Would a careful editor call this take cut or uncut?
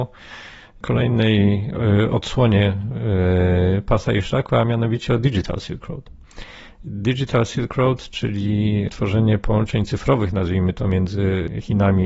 uncut